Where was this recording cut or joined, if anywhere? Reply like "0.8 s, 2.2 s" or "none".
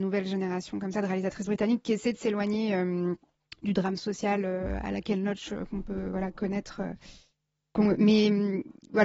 none